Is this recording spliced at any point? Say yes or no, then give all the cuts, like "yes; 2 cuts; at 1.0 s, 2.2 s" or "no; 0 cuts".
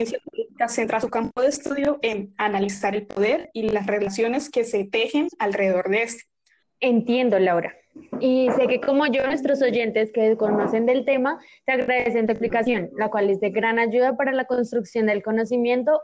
yes; 1 cut; at 6.6 s